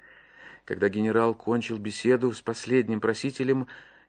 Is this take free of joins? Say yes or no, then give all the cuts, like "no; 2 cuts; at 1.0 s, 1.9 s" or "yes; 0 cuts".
yes; 0 cuts